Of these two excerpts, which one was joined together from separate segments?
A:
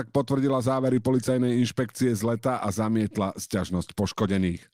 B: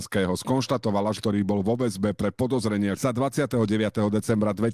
B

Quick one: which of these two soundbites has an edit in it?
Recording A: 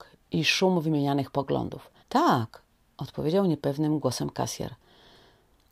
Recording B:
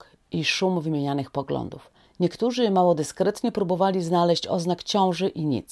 A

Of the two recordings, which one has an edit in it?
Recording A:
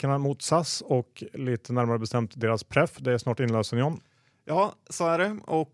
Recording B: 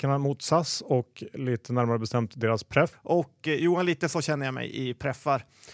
B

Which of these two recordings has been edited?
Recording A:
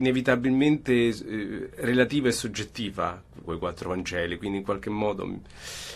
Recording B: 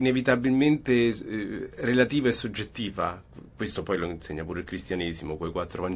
A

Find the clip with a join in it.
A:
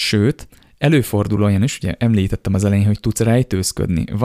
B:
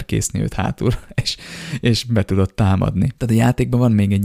B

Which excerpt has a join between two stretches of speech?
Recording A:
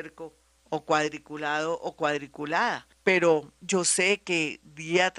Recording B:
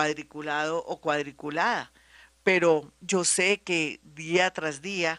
A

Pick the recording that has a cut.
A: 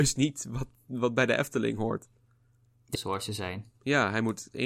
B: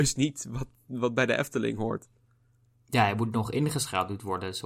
A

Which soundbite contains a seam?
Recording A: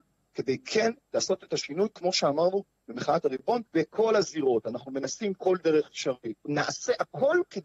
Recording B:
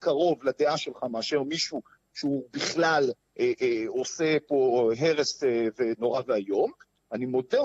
A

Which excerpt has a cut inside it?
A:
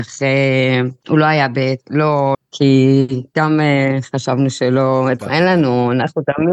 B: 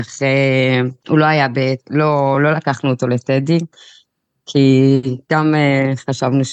A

